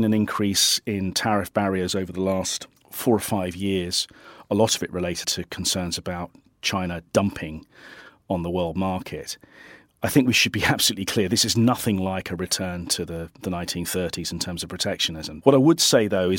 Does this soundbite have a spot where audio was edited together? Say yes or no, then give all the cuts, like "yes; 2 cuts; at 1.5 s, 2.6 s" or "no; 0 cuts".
yes; 2 cuts; at 5.2 s, 15.4 s